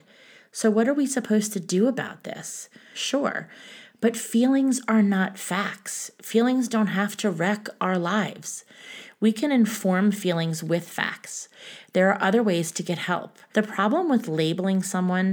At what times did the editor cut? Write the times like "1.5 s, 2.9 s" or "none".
2.9 s, 13.5 s